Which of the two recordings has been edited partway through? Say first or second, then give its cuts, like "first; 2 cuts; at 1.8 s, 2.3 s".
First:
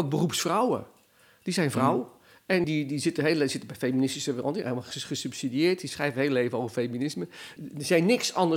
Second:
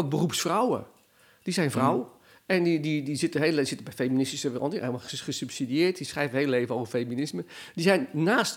first; 2 cuts; at 2.6 s, 7.6 s